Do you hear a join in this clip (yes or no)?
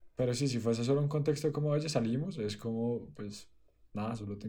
no